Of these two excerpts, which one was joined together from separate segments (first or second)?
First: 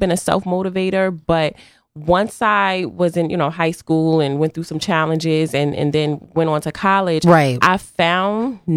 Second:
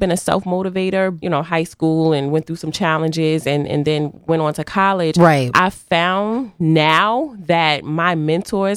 second